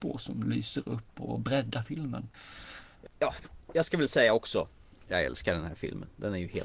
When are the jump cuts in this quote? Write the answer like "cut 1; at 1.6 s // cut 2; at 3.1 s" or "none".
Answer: none